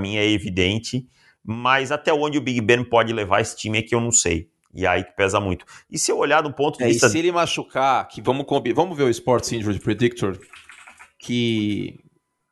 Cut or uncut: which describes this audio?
uncut